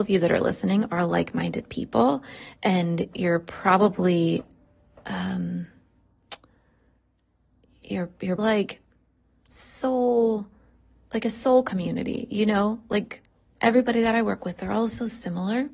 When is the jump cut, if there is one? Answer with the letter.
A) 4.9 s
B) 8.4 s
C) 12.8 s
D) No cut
B